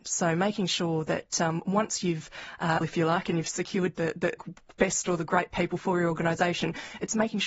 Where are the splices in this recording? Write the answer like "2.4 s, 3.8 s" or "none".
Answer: 2.8 s, 4.4 s